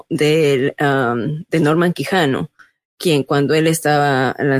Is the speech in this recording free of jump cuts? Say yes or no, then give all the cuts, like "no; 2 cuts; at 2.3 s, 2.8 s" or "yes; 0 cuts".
yes; 0 cuts